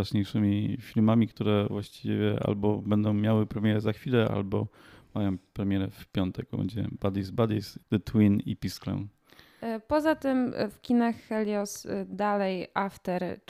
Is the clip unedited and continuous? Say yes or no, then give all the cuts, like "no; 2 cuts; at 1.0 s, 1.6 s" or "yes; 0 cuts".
no; 1 cut; at 7.8 s